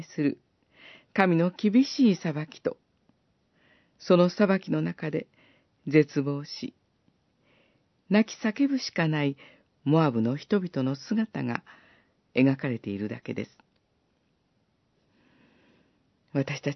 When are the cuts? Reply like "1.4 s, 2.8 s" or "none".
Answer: none